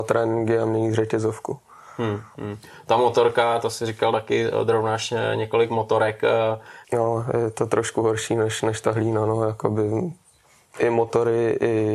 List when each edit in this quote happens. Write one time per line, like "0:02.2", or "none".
0:06.8